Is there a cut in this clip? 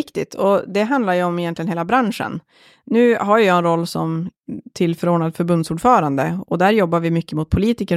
no; 0 cuts

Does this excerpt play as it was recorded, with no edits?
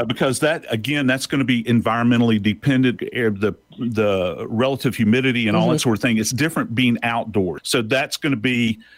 no; 2 cuts; at 3.0 s, 7.6 s

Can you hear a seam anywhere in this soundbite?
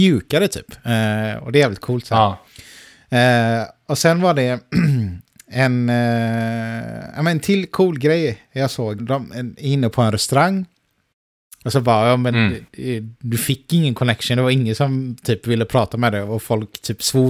yes; 2 cuts; at 9.0 s, 11.6 s

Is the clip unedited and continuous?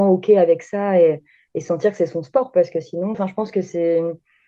no; 1 cut; at 3.1 s

